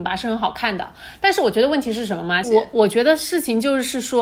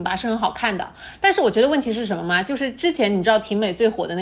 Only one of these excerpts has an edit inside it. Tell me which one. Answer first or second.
first